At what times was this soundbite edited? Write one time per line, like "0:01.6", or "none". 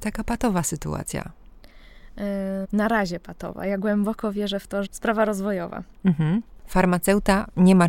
0:02.6
0:04.9
0:06.6